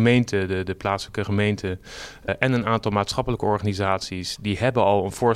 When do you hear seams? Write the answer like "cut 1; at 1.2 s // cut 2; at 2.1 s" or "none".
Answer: cut 1; at 2.3 s